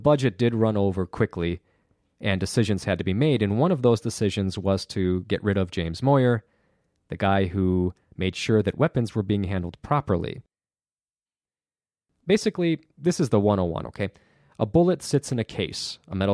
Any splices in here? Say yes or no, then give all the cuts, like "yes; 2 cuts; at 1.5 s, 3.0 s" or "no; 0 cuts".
no; 0 cuts